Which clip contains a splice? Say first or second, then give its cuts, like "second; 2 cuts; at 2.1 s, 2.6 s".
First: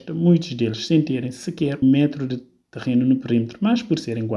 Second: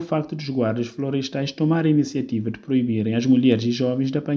first; 1 cut; at 1.8 s